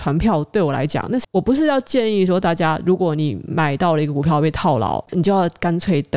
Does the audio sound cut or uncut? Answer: cut